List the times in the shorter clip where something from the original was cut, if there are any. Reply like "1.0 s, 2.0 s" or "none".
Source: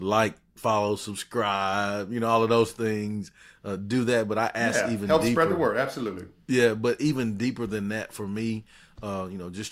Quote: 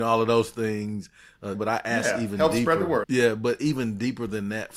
1.5 s, 3.0 s